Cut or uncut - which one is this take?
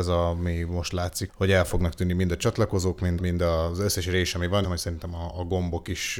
cut